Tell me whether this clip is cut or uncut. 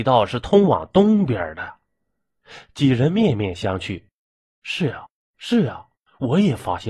uncut